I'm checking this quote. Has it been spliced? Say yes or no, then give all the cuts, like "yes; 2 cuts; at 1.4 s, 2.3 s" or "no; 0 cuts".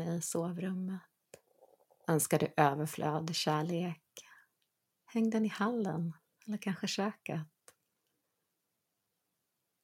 no; 0 cuts